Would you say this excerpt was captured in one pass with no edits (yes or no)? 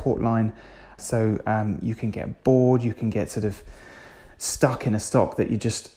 no